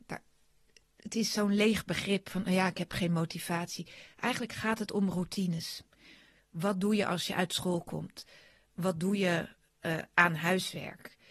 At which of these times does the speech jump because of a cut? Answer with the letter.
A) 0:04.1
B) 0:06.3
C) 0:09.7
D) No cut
D